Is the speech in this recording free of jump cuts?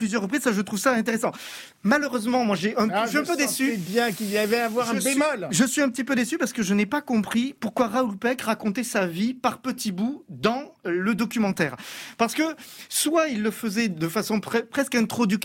yes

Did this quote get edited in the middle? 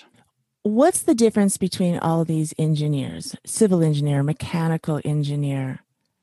no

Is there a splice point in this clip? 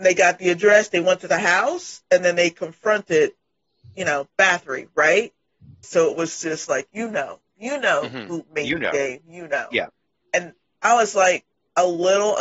yes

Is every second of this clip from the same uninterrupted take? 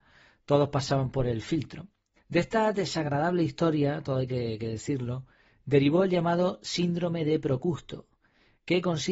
no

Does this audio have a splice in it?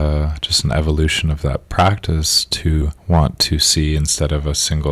yes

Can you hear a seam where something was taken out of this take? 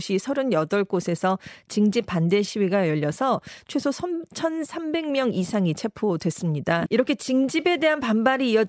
yes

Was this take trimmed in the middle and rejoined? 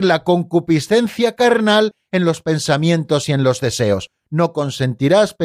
no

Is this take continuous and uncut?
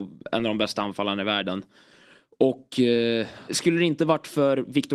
no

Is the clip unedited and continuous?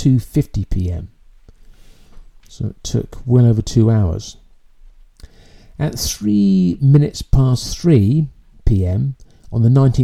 yes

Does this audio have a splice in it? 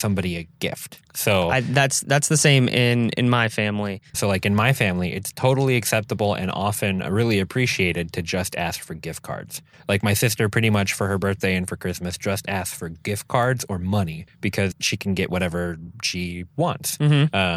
yes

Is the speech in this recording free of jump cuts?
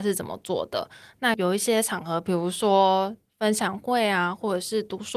no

